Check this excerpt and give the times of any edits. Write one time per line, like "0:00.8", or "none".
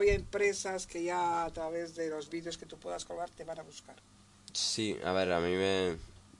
none